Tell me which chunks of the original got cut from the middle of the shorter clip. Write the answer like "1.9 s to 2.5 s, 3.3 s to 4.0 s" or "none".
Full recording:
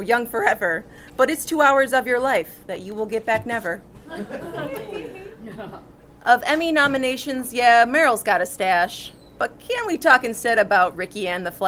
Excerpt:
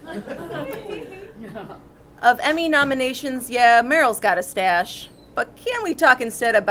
none